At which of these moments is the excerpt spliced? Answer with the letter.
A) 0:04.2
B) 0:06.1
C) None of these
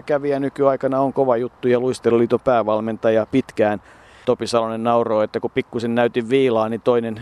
A